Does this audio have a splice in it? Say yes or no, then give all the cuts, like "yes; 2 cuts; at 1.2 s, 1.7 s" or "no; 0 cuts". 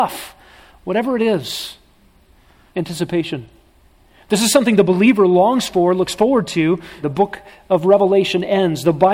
yes; 2 cuts; at 2.7 s, 7.0 s